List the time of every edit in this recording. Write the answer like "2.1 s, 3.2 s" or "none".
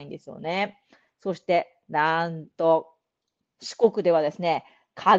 none